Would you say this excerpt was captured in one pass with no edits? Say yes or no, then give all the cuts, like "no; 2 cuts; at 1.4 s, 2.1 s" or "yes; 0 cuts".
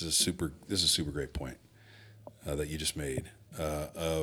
yes; 0 cuts